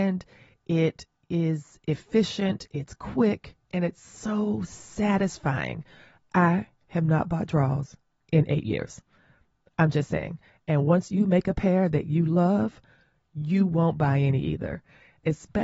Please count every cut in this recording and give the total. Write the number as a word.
zero